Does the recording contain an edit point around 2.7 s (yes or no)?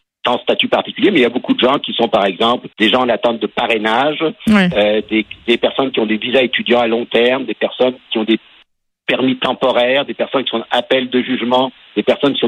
yes